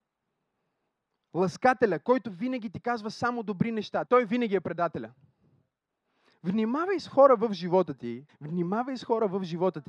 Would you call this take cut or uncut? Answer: cut